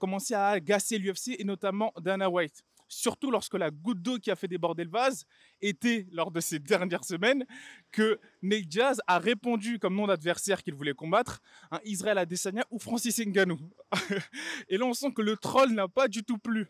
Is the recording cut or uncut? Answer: uncut